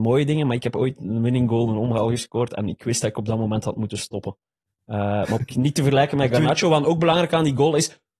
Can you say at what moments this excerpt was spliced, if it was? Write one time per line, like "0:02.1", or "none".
0:05.4